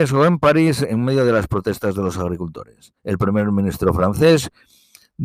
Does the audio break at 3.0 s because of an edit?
yes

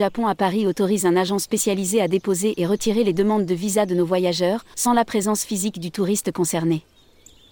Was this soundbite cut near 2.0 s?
no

